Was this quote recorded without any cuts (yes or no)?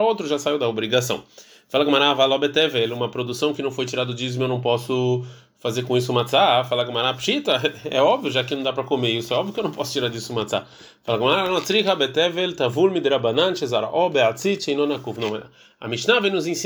yes